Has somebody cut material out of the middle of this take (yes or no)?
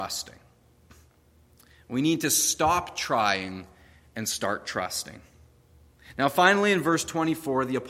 no